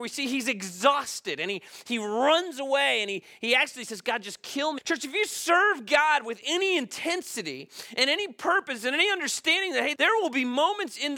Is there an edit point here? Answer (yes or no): yes